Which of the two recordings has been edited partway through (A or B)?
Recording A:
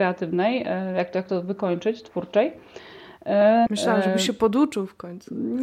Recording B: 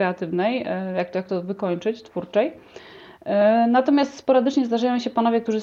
A